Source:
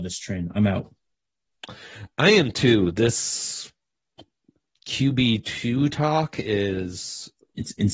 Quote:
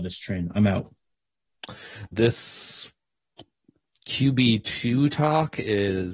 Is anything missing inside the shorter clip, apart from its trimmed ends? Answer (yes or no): yes